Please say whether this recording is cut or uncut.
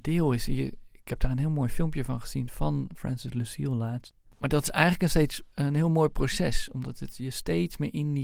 cut